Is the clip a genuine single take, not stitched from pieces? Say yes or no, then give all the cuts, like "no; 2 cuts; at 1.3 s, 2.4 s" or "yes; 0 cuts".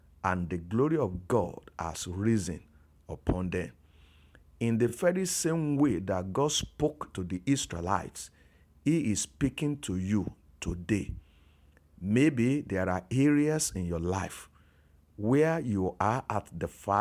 yes; 0 cuts